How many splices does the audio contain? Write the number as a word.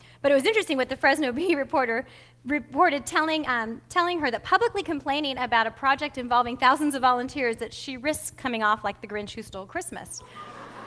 zero